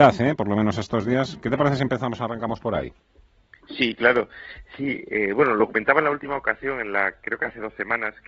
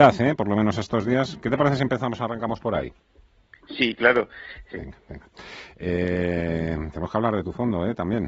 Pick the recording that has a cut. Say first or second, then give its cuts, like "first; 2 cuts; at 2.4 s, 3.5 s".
second; 1 cut; at 4.7 s